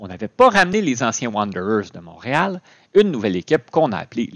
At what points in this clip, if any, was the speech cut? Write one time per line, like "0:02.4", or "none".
0:02.9